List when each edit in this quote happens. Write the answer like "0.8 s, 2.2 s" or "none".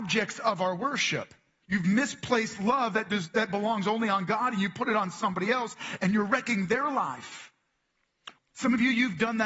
1.6 s, 8.4 s